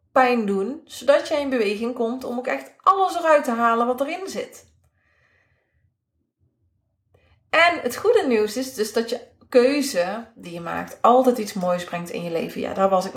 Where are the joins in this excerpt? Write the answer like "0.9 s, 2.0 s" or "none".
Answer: none